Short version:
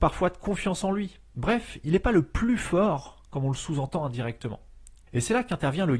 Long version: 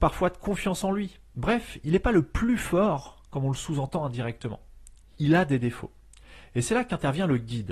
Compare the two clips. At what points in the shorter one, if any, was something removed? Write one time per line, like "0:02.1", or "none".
0:05.1